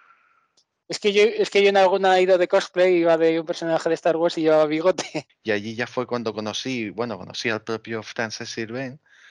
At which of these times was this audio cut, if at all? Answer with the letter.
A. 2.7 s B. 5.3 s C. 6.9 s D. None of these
B